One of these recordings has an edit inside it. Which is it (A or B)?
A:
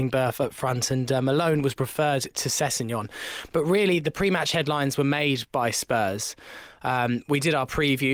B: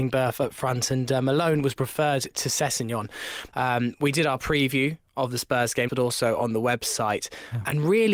B